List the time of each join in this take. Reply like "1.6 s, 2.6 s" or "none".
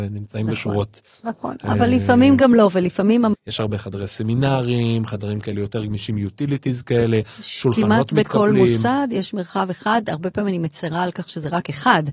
3.3 s